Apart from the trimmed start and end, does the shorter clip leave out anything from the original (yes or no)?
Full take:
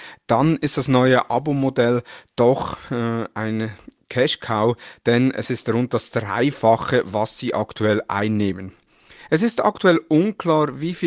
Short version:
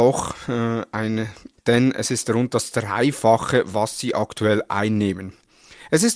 yes